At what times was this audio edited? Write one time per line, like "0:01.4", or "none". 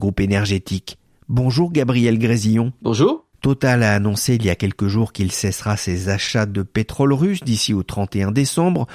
none